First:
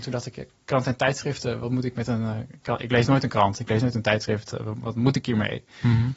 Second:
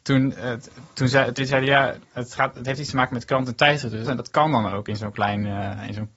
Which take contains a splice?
second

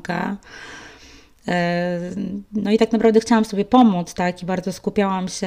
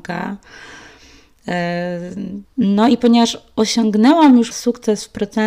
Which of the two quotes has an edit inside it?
second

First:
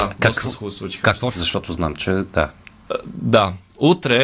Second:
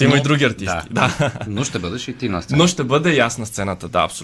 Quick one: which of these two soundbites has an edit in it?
first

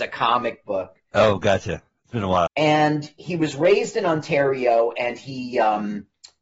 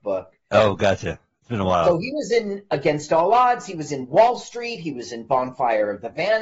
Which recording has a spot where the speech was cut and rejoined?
first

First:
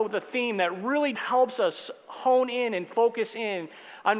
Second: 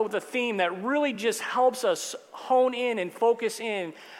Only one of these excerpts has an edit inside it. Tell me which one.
first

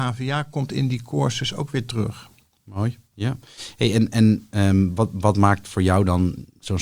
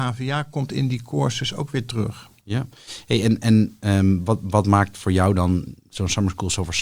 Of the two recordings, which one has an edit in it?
second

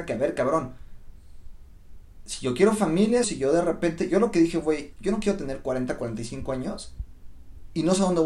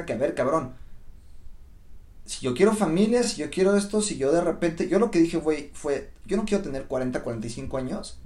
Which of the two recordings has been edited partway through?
first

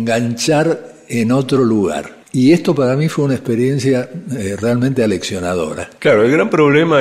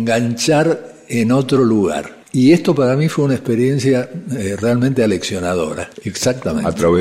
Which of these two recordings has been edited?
second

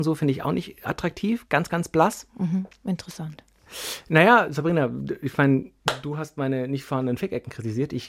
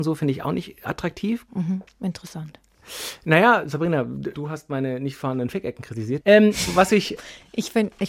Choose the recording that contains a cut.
second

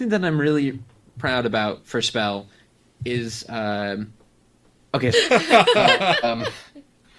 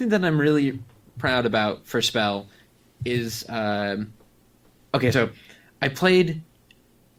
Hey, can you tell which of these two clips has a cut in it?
first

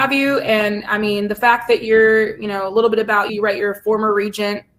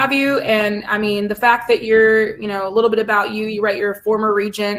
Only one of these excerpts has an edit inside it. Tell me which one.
first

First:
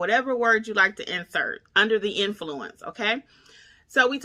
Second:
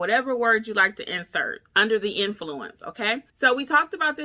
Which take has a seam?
second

